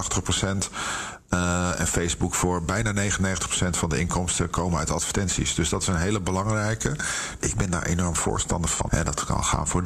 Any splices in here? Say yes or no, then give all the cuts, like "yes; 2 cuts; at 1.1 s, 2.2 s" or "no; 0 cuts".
yes; 2 cuts; at 7.4 s, 8.9 s